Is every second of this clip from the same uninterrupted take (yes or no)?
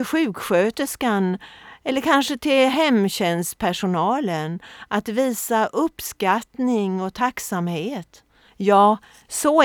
no